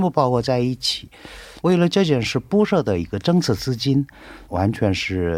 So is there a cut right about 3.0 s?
no; 2 cuts; at 1.6 s, 4.5 s

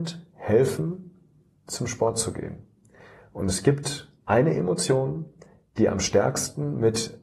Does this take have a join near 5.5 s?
no; 1 cut; at 4.2 s

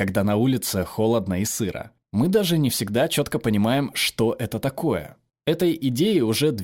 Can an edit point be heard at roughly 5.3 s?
yes; 2 cuts; at 2.0 s, 5.3 s

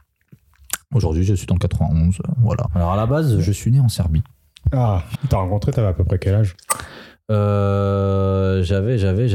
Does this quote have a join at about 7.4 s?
no; 2 cuts; at 2.7 s, 5.1 s

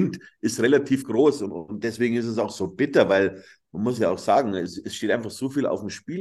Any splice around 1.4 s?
no; 0 cuts

